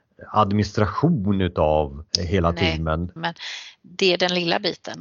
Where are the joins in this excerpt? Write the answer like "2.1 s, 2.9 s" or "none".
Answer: 2.1 s, 3.2 s